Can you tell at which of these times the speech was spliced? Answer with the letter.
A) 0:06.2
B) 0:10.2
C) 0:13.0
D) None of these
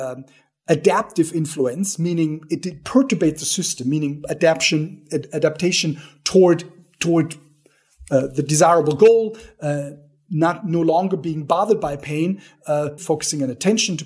C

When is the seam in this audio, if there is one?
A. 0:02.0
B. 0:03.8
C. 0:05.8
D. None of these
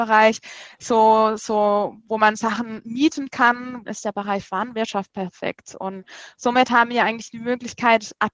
B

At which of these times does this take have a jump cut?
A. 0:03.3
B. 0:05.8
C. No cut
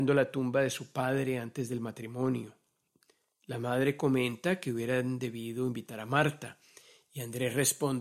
C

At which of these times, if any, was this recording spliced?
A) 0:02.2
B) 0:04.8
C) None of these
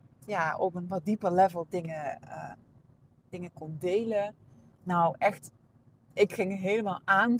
B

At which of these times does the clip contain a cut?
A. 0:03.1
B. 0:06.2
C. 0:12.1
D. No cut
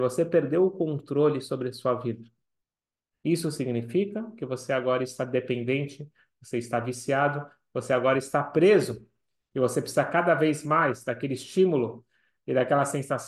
A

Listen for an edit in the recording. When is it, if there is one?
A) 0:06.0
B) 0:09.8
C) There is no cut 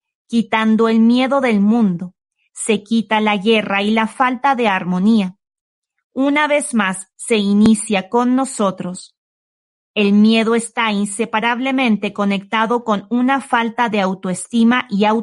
C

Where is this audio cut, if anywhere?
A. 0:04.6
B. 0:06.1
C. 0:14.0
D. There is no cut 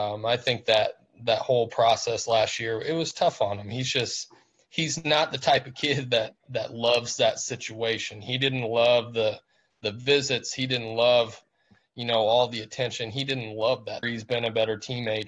C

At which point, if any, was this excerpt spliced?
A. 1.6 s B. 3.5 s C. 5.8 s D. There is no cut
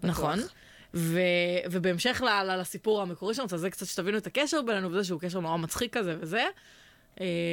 D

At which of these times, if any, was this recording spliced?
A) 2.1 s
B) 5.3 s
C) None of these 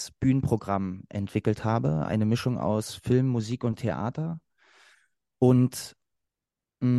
C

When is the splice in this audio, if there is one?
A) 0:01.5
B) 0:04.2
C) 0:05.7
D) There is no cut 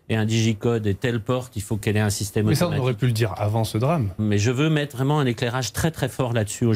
B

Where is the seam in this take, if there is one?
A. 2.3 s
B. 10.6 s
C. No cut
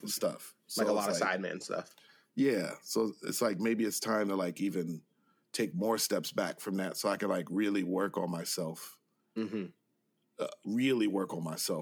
C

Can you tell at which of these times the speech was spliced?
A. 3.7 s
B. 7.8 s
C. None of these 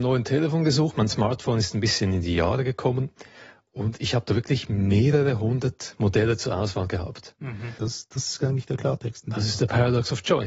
B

